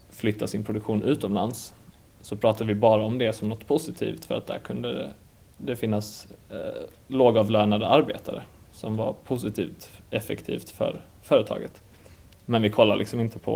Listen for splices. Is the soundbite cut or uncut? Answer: uncut